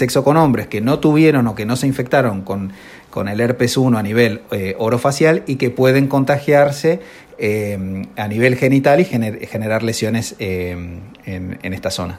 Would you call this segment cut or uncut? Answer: uncut